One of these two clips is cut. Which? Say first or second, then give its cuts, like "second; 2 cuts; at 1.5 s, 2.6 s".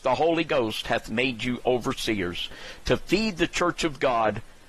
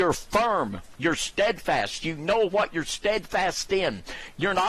second; 1 cut; at 1.0 s